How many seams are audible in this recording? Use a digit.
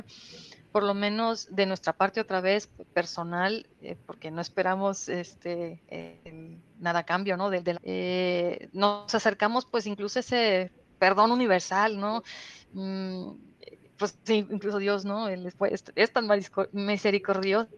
1